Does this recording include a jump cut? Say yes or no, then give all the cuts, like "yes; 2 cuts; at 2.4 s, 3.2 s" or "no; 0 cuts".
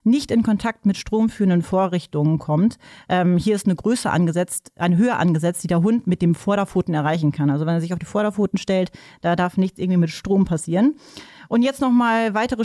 no; 0 cuts